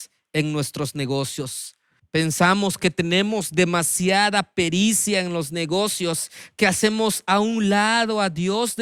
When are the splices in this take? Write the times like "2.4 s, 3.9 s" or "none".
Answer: 2.0 s

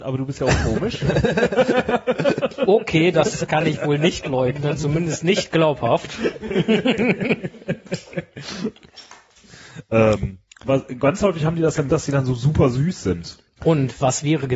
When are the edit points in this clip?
10.6 s, 11.9 s, 13.6 s

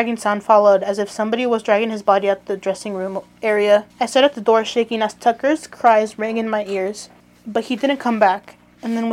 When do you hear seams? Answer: 3.9 s

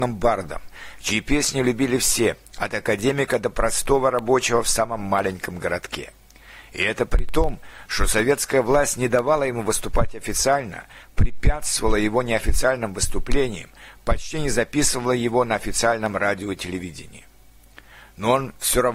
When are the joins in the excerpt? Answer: none

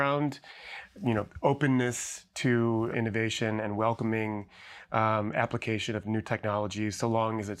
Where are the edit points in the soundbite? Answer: 2.9 s

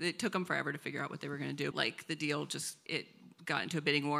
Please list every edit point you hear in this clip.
1.7 s, 2.9 s

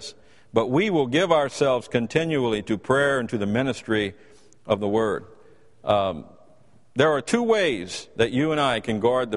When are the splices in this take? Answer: none

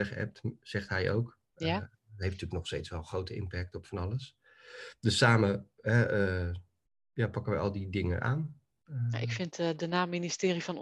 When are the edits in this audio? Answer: none

